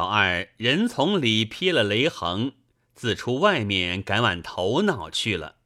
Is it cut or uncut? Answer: uncut